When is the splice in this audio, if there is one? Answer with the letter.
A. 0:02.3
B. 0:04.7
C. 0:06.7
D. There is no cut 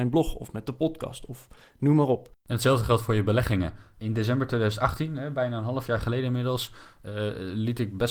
A